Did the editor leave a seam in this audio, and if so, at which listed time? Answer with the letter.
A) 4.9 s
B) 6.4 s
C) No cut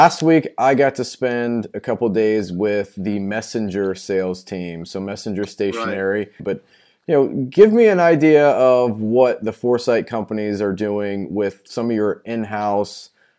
B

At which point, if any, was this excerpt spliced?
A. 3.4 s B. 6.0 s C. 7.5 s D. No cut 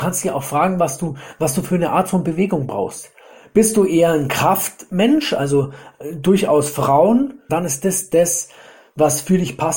C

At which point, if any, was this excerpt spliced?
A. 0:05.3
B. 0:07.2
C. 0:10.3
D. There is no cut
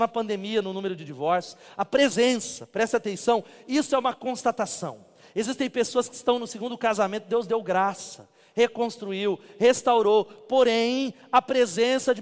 D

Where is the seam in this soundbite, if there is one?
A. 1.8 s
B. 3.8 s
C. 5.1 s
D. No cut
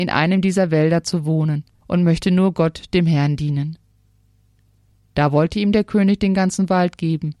A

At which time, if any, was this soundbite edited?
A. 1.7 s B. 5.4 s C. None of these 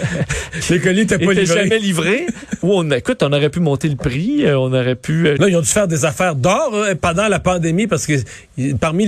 B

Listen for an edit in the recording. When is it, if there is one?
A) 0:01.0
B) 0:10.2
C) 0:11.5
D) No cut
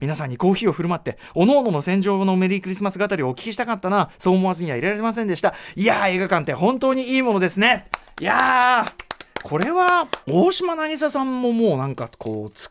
B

